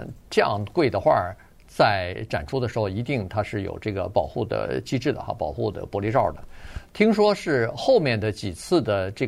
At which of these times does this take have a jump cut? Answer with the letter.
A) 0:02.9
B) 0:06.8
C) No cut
B